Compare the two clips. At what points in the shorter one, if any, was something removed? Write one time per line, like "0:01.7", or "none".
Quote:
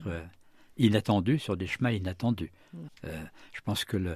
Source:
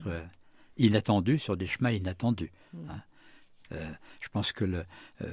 0:02.9